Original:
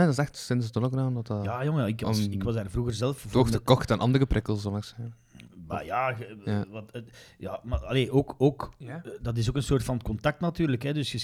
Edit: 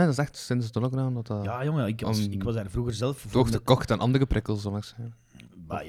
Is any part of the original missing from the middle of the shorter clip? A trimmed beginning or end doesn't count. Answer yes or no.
no